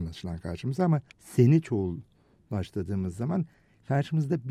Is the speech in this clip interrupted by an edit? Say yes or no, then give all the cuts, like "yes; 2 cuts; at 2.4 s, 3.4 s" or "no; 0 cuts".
yes; 1 cut; at 1.1 s